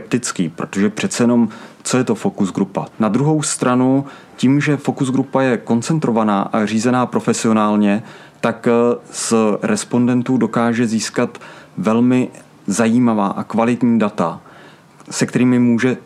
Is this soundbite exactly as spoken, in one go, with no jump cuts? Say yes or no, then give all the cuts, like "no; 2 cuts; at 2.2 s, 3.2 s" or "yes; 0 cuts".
no; 1 cut; at 2.9 s